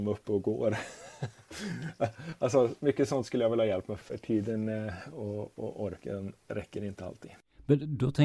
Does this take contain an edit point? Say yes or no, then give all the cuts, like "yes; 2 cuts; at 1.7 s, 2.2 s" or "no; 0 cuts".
yes; 2 cuts; at 4.0 s, 5.5 s